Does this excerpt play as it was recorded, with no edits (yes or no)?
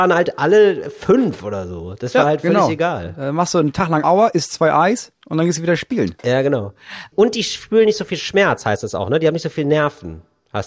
no